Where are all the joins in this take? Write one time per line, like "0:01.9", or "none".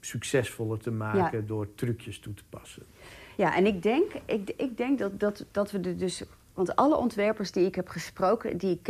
none